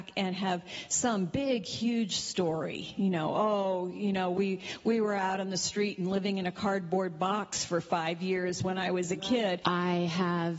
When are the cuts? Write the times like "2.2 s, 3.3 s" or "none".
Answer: 9.6 s